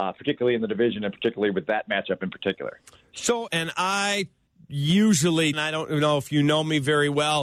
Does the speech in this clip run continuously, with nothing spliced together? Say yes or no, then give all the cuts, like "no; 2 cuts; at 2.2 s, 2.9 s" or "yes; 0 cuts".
no; 2 cuts; at 3.5 s, 5.5 s